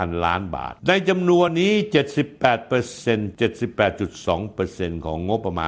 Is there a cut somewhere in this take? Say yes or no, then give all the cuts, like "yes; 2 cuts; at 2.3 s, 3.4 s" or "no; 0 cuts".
no; 0 cuts